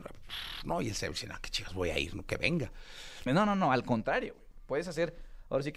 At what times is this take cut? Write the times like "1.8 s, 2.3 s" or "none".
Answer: 3.3 s

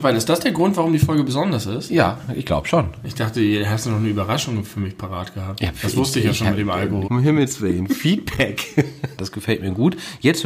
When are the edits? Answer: 7.1 s, 9.2 s

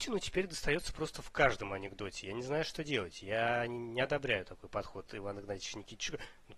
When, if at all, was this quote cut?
none

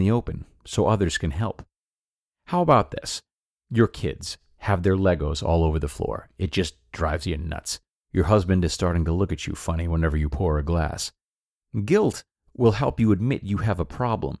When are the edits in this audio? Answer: 8.0 s

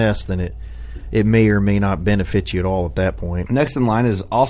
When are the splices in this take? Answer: 3.5 s

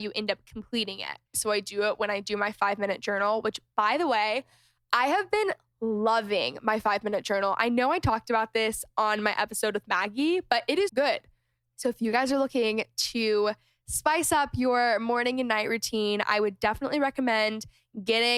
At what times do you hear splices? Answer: 1.3 s, 10.9 s

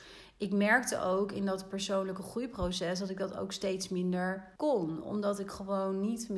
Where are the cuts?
4.6 s

